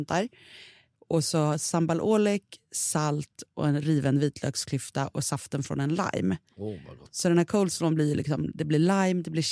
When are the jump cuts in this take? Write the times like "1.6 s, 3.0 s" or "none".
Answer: none